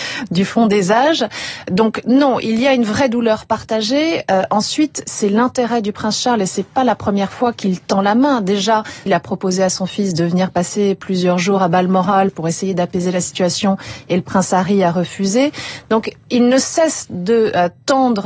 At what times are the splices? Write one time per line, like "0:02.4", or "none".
0:09.1

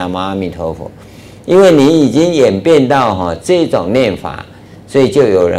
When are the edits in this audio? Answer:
none

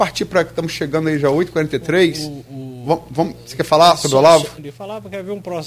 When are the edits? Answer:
0:04.6

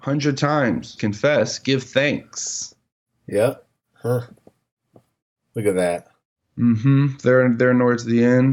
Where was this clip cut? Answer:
0:01.0

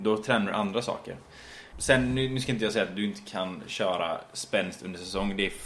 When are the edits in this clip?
0:01.7

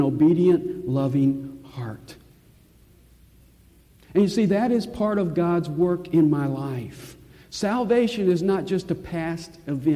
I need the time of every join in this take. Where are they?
none

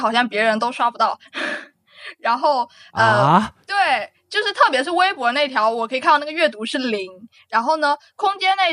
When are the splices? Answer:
none

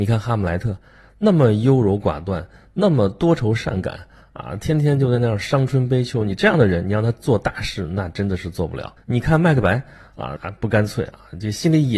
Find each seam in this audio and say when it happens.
0:09.0
0:10.4

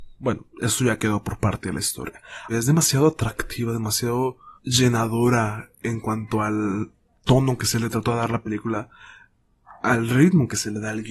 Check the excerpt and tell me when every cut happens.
0:02.5
0:04.6

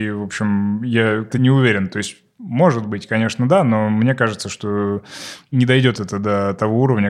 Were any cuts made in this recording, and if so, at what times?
0:01.3

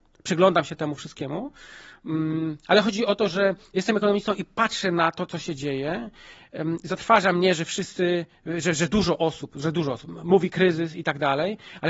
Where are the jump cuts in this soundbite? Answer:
0:10.0

